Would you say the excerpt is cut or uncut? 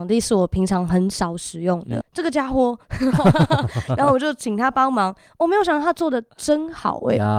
cut